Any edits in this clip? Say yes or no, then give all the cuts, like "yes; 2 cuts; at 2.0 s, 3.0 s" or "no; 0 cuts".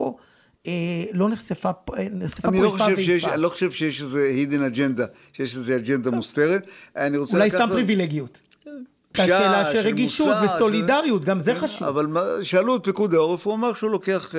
yes; 1 cut; at 9.1 s